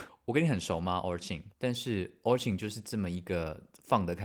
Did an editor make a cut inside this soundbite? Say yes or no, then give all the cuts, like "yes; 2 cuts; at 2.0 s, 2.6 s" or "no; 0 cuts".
yes; 1 cut; at 1.5 s